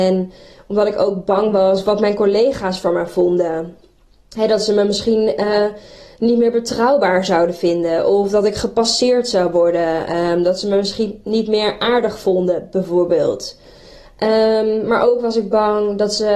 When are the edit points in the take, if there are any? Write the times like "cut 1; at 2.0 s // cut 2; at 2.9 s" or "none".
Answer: none